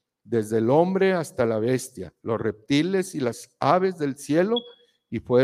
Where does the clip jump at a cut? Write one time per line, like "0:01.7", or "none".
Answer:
none